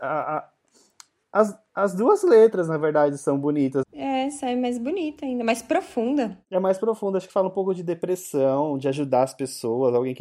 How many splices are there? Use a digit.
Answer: 1